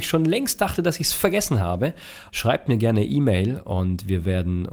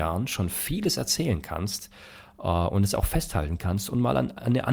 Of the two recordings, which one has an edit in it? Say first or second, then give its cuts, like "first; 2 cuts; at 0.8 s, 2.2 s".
first; 1 cut; at 2.3 s